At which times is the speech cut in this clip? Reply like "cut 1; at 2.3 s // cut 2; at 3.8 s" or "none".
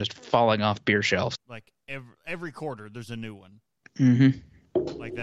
cut 1; at 1.3 s